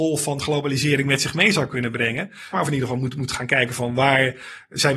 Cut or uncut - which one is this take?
cut